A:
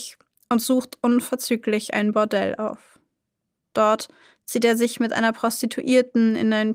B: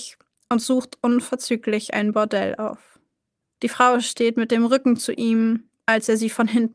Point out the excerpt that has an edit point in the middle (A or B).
B